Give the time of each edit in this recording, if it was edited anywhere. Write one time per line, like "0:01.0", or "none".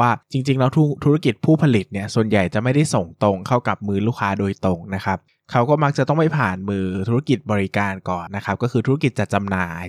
0:08.3